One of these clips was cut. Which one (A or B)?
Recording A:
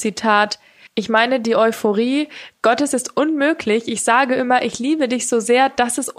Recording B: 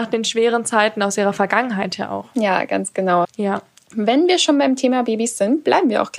B